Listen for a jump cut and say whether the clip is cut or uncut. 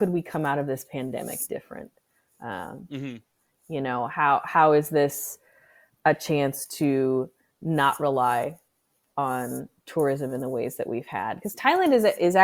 uncut